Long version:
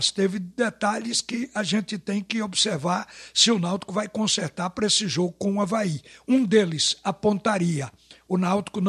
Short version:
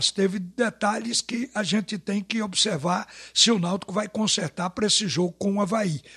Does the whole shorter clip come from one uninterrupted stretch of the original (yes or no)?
yes